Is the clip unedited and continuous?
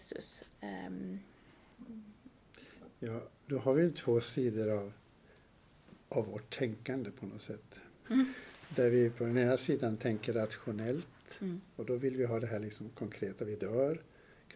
no; 2 cuts; at 6.0 s, 8.0 s

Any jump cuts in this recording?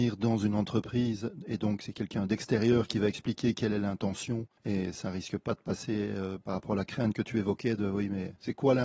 yes; 1 cut; at 4.6 s

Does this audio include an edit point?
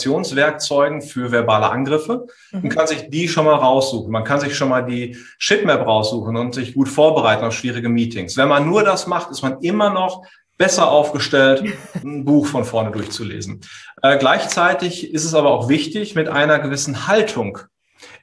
yes; 1 cut; at 12.0 s

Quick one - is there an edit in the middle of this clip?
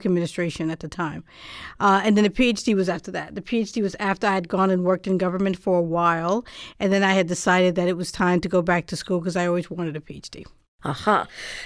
no; 0 cuts

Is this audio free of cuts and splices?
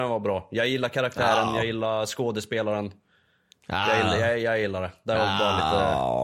yes; 0 cuts

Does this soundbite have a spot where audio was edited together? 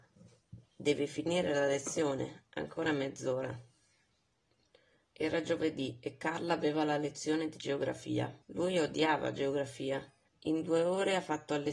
yes; 2 cuts; at 8.4 s, 10.3 s

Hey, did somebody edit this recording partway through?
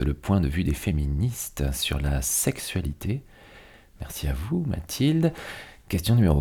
no; 0 cuts

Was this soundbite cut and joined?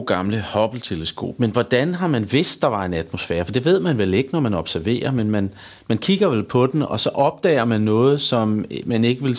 no; 0 cuts

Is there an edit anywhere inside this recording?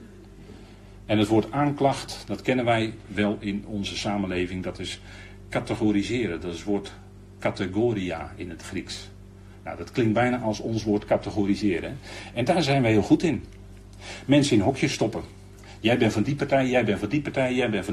no; 0 cuts

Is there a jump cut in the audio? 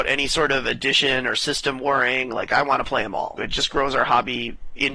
yes; 1 cut; at 3.4 s

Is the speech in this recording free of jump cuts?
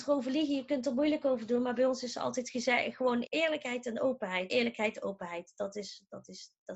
no; 2 cuts; at 3.2 s, 4.5 s

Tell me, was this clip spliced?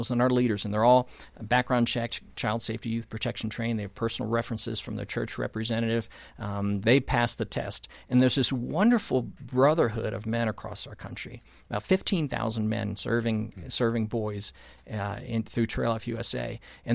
no; 0 cuts

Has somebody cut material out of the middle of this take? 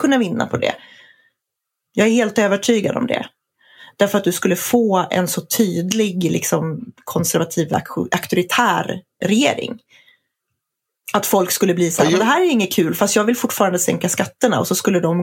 yes; 1 cut; at 9.2 s

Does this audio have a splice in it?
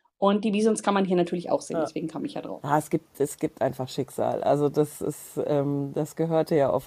no; 0 cuts

